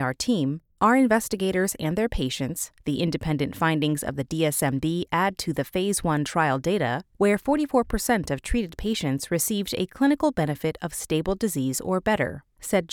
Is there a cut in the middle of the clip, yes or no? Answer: no